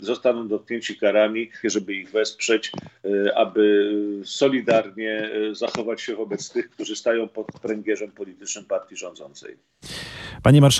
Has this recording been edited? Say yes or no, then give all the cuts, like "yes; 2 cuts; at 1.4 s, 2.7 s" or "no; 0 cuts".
yes; 1 cut; at 1.6 s